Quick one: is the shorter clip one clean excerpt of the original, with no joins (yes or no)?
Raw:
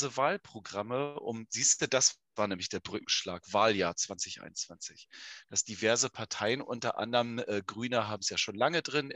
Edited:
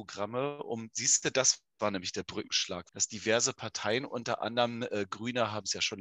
no